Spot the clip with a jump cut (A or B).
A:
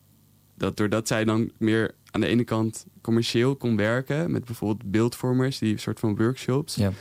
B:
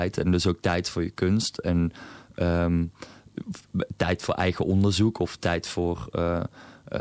A